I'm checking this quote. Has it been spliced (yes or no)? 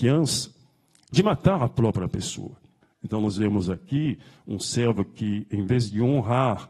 yes